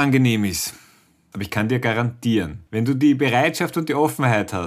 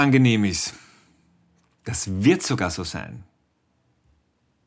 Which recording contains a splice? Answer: first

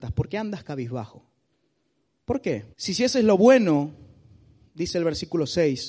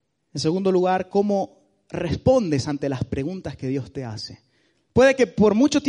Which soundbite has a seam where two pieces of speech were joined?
first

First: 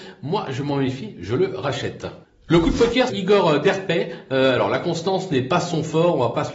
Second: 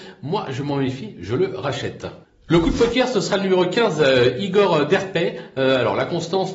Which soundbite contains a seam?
first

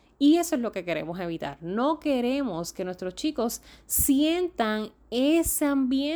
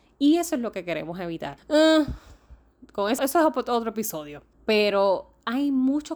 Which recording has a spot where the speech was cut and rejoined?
second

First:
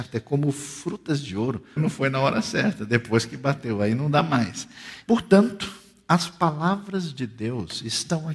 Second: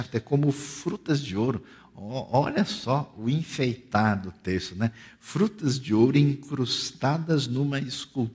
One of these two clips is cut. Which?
first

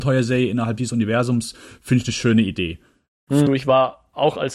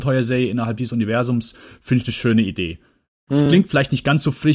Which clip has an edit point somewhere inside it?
first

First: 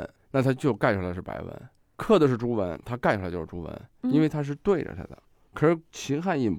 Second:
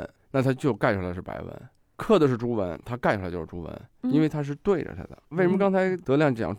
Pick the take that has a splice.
second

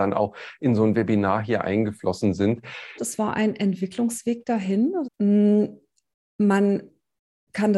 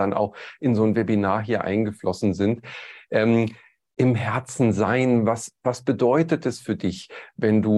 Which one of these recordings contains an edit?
first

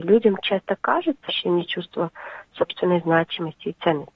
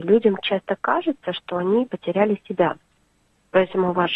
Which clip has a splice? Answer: first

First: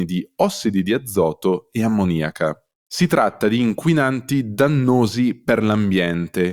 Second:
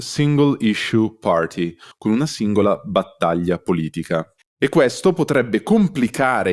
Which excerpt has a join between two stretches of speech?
second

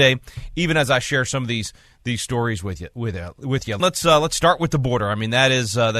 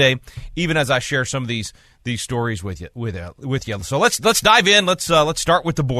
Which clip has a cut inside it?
first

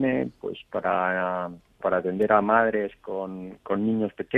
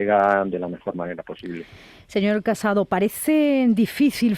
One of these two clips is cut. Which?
first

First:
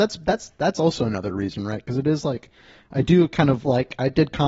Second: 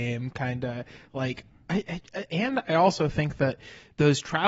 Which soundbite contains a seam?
second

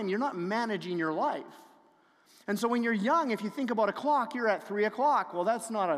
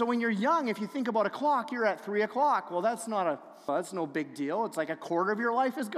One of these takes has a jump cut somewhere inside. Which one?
second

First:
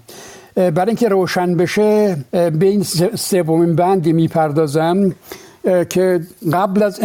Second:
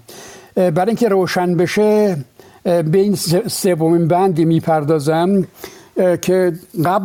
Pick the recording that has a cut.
first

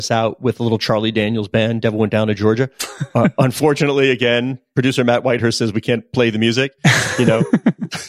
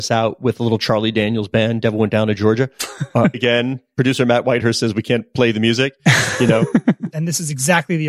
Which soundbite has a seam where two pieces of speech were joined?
second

